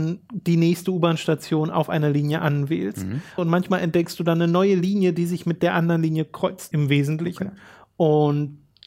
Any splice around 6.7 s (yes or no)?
yes